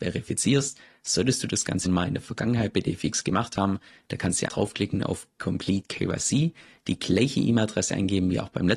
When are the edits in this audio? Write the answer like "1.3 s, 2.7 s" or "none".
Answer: 1.8 s, 4.5 s